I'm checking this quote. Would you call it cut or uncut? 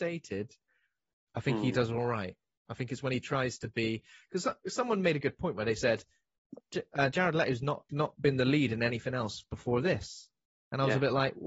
uncut